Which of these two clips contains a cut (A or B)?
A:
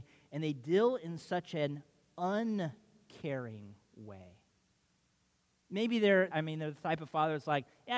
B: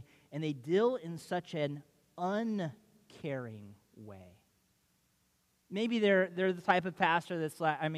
A